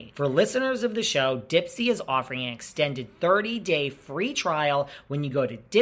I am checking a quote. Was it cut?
no; 0 cuts

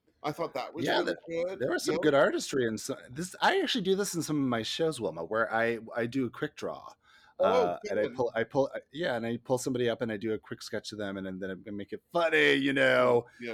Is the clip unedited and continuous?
yes; 0 cuts

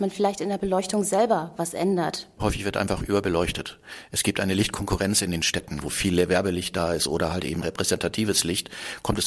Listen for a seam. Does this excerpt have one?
yes; 3 cuts; at 2.4 s, 5.8 s, 7.6 s

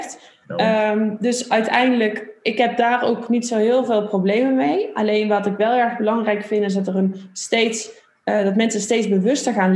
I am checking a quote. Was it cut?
no; 0 cuts

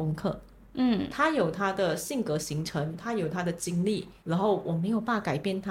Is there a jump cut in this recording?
yes; 1 cut; at 4.2 s

